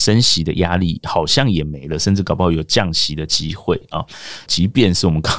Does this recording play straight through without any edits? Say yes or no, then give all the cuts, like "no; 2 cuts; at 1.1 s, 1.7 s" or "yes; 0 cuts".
no; 1 cut; at 4.5 s